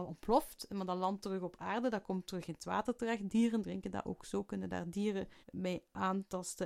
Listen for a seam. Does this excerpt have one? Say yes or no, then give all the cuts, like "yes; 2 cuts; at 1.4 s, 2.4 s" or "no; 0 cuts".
yes; 1 cut; at 5.4 s